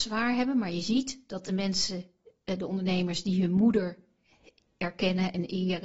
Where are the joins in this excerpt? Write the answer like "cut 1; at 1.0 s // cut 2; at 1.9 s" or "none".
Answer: none